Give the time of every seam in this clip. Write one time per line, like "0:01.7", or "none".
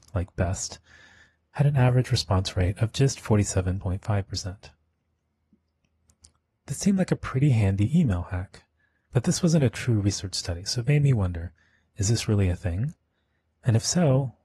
none